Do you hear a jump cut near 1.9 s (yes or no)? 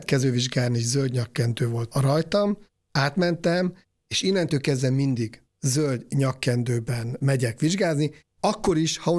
yes